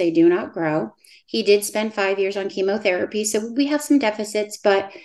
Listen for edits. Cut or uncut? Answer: uncut